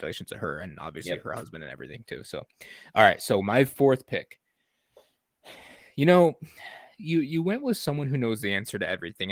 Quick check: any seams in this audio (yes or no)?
no